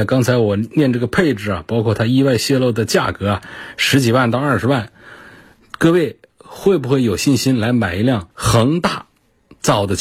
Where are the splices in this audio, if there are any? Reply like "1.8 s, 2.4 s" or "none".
8.3 s

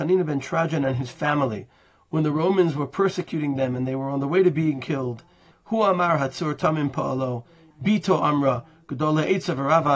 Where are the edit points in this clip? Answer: 5.5 s, 7.7 s

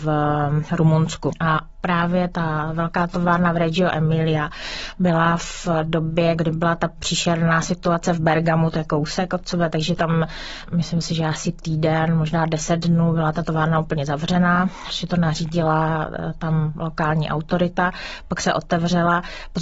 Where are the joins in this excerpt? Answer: none

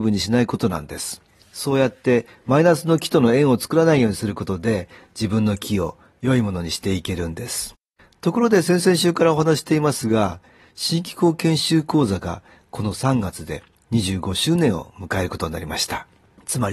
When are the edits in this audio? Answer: none

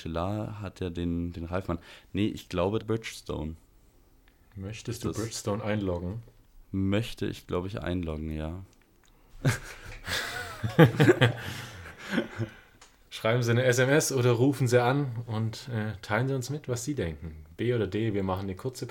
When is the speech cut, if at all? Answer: 2.8 s, 9.3 s

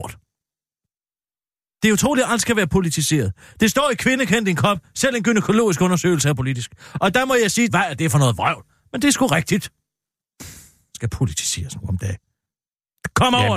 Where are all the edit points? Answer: 7.7 s

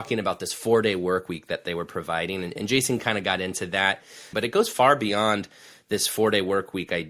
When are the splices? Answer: 4.3 s

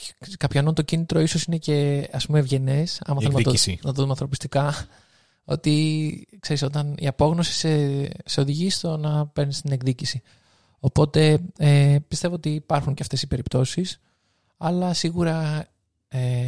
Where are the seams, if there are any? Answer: none

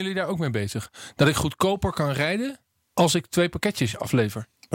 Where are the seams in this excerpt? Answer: none

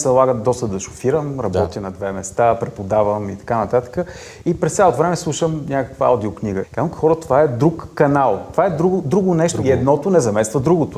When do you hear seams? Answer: 6.6 s

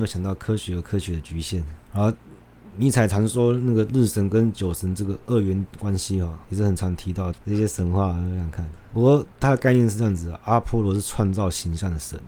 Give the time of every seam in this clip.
7.3 s

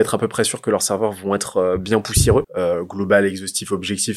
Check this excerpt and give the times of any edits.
2.4 s

